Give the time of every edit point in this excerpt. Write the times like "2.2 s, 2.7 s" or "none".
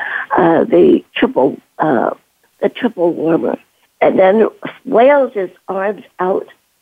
3.8 s